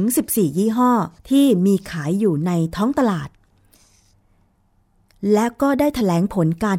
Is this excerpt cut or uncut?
cut